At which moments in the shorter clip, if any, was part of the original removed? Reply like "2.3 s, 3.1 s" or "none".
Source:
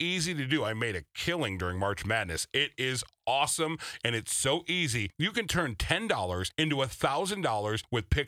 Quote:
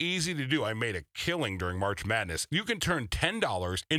2.5 s